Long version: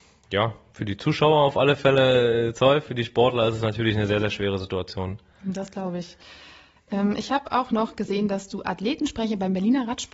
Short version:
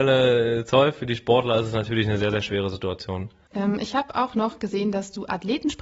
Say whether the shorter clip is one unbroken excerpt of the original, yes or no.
no